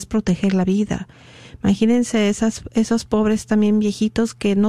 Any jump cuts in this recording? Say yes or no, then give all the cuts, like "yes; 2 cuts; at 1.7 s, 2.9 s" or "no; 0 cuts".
no; 0 cuts